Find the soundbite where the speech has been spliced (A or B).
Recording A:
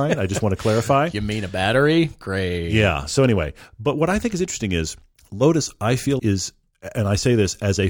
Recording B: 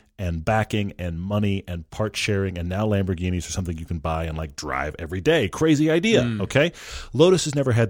A